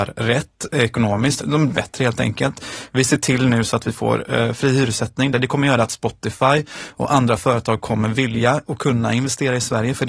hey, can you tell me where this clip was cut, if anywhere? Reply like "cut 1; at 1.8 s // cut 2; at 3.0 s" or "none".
cut 1; at 1.4 s // cut 2; at 5.3 s